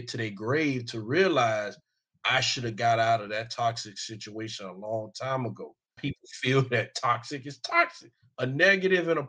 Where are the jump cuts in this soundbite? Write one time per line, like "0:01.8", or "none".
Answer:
0:06.0
0:08.3